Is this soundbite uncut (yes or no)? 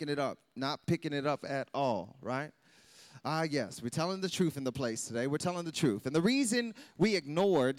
yes